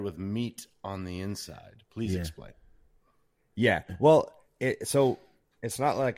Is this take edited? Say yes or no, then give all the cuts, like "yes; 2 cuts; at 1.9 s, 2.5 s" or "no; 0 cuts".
no; 0 cuts